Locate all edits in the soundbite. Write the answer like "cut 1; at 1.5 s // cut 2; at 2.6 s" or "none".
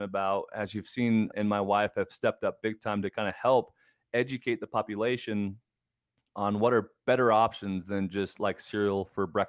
cut 1; at 1.3 s

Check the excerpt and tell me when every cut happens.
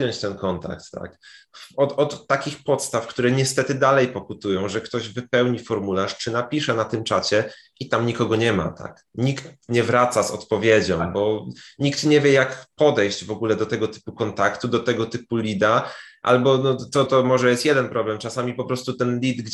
cut 1; at 17.1 s

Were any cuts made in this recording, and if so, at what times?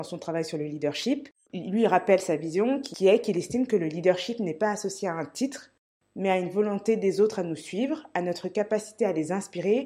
none

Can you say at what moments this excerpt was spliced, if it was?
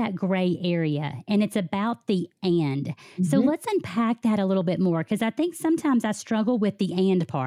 none

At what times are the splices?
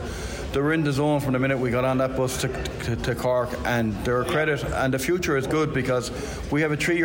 none

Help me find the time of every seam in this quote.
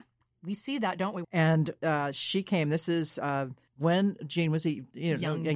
cut 1; at 1.2 s

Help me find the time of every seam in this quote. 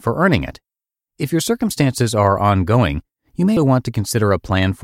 cut 1; at 3.6 s

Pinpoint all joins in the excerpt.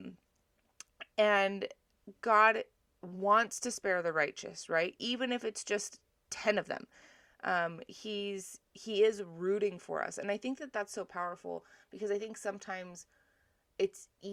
none

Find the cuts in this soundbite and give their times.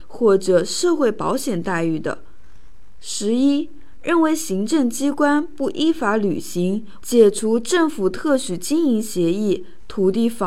cut 1; at 7.0 s

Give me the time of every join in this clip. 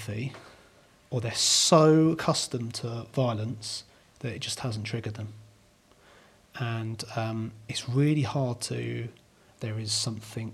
cut 1; at 9.5 s

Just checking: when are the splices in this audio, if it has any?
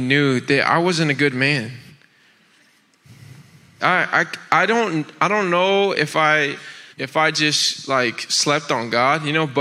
cut 1; at 3.8 s // cut 2; at 6.9 s

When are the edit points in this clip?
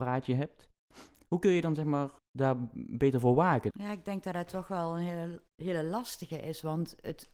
cut 1; at 2.2 s // cut 2; at 3.7 s

